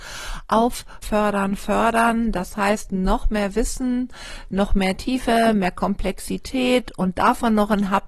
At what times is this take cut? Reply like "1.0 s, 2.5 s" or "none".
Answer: 1.0 s